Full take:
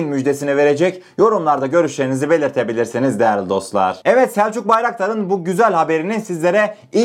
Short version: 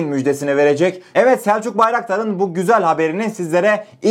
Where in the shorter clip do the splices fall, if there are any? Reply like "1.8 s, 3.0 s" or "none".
1.1 s